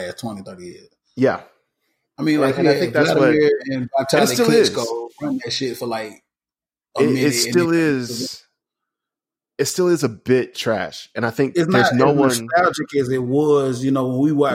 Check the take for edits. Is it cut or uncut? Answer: uncut